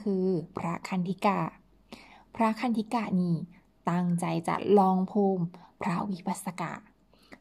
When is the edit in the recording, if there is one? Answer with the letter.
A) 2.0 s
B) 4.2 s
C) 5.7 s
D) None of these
D